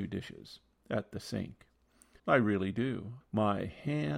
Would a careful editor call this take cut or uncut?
cut